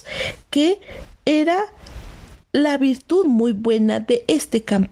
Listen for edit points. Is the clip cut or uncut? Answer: uncut